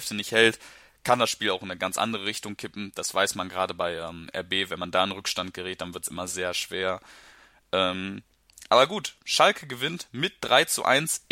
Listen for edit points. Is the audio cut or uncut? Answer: cut